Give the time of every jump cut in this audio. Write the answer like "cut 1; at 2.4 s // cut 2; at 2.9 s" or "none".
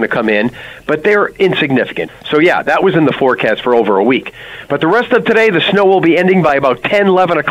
cut 1; at 2.1 s